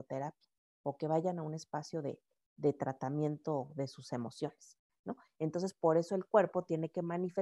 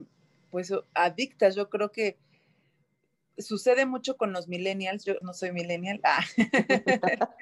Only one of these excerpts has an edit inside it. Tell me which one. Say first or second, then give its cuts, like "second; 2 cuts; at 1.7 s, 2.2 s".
second; 1 cut; at 5.2 s